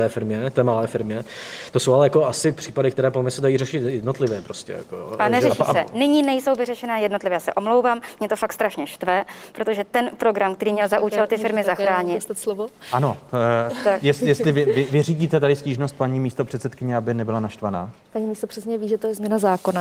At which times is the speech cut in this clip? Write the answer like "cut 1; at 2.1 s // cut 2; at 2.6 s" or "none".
none